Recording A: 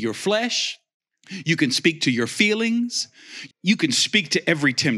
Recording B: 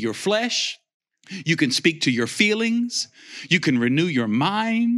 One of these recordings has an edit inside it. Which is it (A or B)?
A